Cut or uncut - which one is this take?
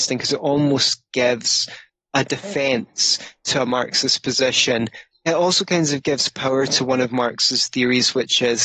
uncut